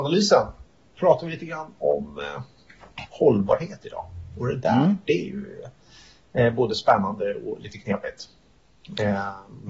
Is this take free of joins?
yes; 0 cuts

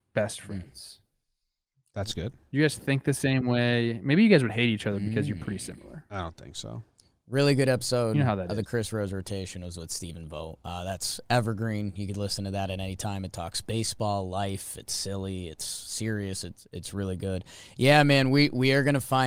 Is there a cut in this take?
no; 0 cuts

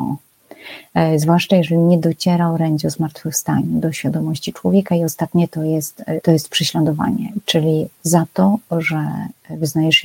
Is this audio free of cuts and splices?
no; 1 cut; at 6.2 s

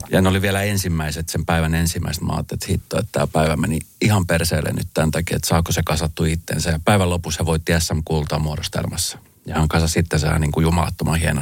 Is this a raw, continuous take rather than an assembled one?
yes; 0 cuts

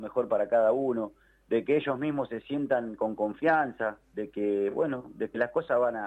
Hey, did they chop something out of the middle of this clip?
no; 0 cuts

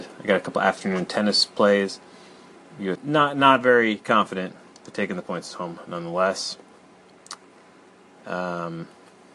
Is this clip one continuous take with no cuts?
no; 1 cut; at 3.0 s

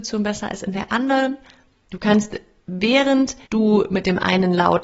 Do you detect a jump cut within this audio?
yes; 2 cuts; at 1.8 s, 3.4 s

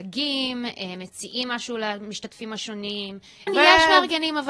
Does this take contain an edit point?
yes; 1 cut; at 3.5 s

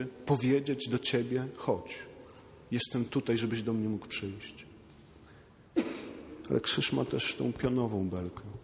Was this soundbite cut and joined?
no; 0 cuts

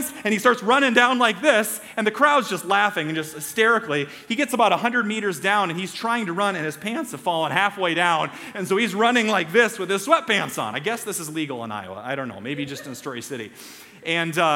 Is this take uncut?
yes; 0 cuts

